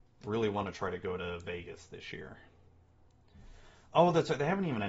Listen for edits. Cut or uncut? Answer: uncut